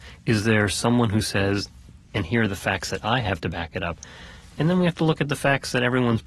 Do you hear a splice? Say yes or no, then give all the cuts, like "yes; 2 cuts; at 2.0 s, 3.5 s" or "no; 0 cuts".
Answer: yes; 1 cut; at 2.0 s